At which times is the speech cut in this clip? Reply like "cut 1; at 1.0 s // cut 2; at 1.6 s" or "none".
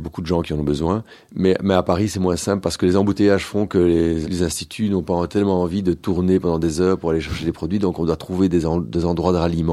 cut 1; at 4.2 s